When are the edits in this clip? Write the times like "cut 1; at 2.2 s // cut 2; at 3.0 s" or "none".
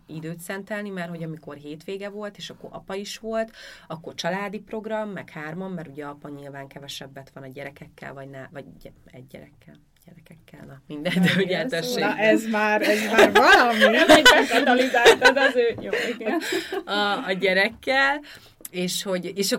none